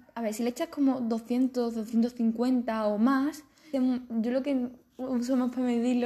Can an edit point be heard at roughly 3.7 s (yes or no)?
yes